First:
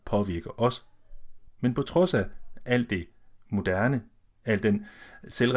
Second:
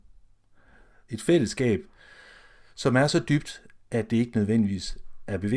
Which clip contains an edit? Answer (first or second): first